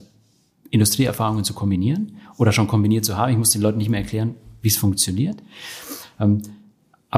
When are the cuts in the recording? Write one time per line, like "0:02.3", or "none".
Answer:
none